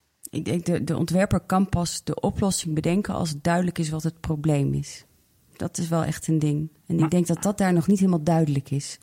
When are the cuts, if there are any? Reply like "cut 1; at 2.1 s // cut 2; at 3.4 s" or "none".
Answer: none